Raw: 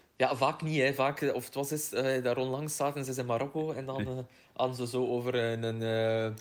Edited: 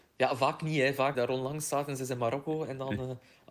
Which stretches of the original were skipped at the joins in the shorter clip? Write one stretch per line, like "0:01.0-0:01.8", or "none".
0:01.1-0:02.2

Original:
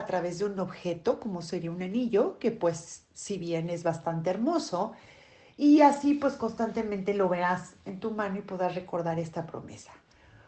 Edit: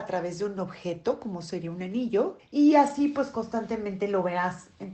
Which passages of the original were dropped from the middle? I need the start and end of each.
0:02.4-0:05.5

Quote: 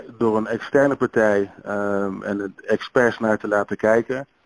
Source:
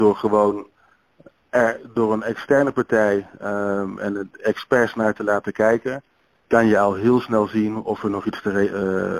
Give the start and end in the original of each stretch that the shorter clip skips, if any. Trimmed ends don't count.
none

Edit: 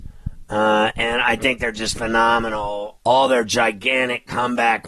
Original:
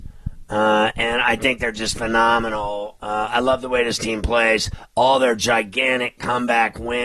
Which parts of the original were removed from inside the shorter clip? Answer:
0:03.0-0:04.9

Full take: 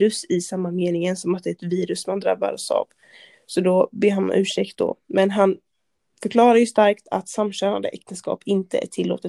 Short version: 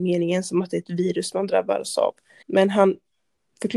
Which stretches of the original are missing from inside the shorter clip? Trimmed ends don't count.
0:03.1-0:05.0

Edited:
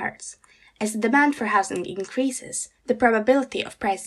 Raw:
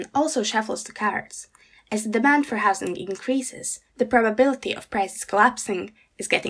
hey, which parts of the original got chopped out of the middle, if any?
none

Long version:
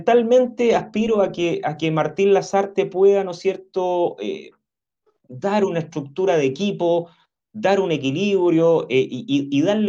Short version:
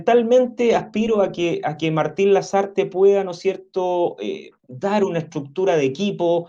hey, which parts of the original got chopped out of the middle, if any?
0:04.6-0:05.2

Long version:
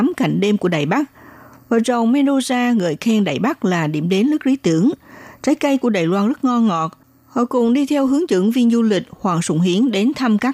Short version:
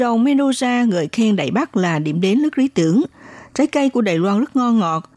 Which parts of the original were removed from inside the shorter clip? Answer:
none

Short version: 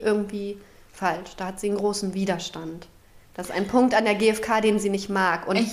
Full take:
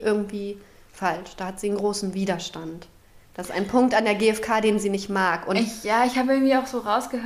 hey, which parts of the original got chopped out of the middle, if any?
none

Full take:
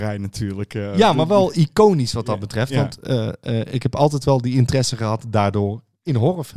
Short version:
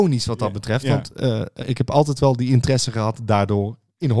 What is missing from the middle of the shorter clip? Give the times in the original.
0:03.5-0:03.6

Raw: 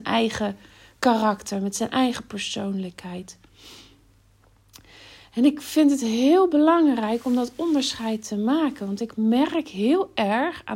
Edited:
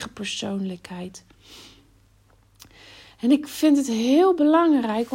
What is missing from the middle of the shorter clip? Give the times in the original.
none

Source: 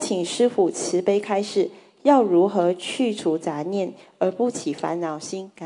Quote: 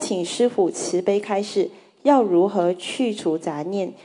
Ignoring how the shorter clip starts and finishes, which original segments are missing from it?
none

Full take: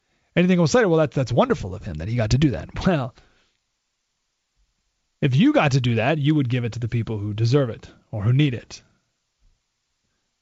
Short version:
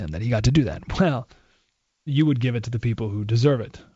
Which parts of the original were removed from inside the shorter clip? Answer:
0:03.9-0:06.2

